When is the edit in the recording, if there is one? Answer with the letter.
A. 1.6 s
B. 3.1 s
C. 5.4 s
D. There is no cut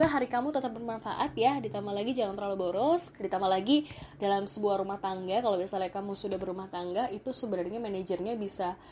B